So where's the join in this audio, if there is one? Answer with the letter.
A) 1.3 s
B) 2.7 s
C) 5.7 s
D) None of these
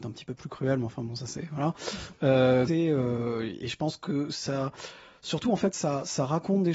B